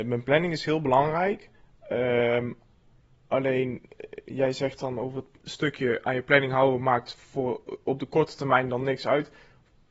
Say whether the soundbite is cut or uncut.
uncut